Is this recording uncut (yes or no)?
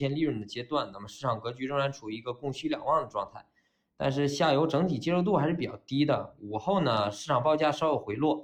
no